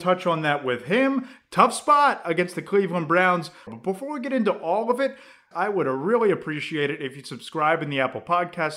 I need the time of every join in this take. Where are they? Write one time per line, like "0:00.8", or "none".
0:01.4
0:03.7
0:05.5